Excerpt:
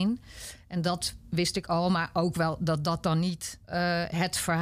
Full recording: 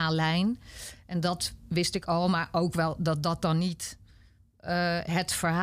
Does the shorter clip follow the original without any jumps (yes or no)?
no